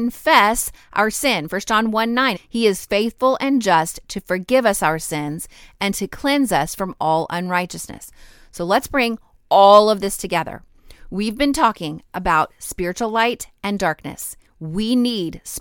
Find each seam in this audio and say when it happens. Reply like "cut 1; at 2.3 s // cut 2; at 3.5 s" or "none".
cut 1; at 2.4 s